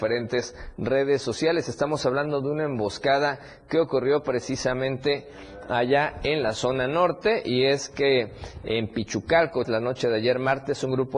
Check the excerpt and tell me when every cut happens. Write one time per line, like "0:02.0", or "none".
0:09.6